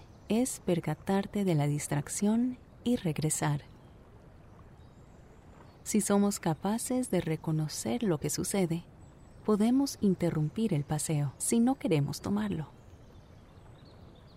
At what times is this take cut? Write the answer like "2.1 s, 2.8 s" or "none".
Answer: 5.8 s, 11.4 s